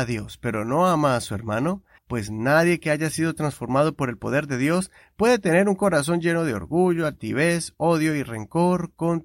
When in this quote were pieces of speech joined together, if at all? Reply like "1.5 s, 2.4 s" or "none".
2.0 s